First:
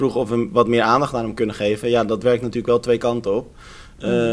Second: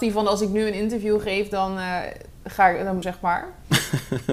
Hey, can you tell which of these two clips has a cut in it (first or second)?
second